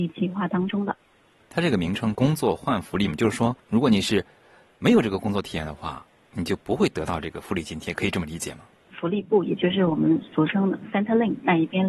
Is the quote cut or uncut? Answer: cut